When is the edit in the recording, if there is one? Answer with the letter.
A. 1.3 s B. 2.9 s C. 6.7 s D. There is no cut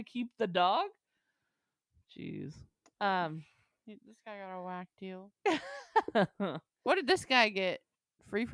D